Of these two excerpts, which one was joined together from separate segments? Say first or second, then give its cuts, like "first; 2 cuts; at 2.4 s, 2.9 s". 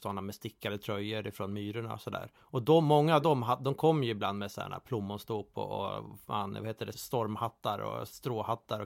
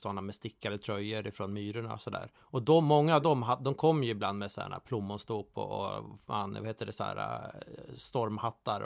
first; 1 cut; at 6.9 s